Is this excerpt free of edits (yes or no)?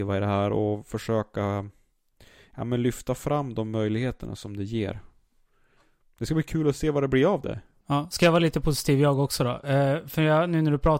yes